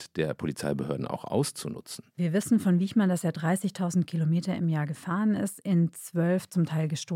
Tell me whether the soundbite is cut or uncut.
uncut